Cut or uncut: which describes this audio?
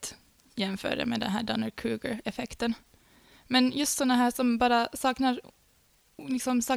uncut